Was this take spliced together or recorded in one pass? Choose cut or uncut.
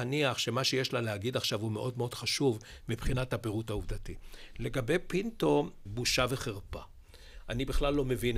cut